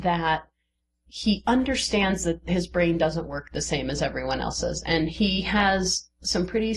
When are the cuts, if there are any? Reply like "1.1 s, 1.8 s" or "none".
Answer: none